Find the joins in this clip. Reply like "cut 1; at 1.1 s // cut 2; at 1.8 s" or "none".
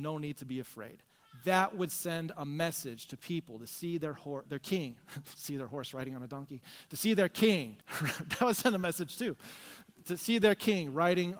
cut 1; at 4.5 s // cut 2; at 7.8 s